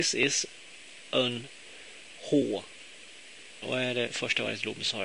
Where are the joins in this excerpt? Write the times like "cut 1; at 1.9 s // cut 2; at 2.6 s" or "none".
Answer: cut 1; at 3.6 s